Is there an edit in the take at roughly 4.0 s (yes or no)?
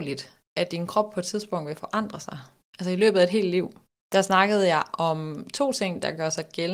yes